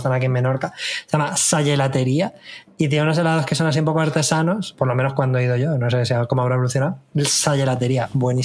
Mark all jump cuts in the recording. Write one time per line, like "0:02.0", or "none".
none